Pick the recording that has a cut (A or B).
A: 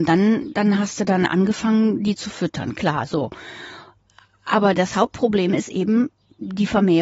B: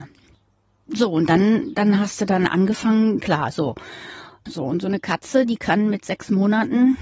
B